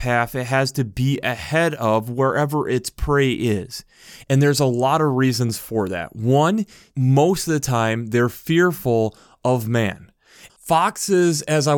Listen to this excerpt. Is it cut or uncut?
cut